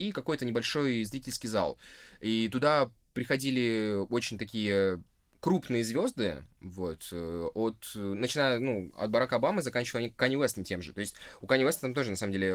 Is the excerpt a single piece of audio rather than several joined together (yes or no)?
yes